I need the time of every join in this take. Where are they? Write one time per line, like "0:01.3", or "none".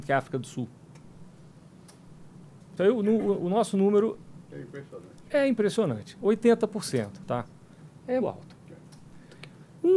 0:02.8
0:08.2